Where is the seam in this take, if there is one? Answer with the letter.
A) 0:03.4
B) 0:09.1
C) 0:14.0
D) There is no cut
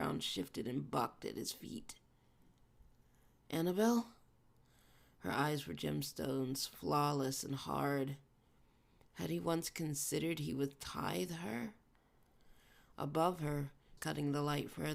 C